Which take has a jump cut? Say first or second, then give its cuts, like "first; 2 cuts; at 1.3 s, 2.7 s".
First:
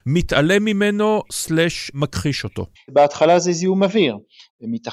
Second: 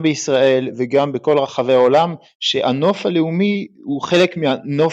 first; 1 cut; at 2.8 s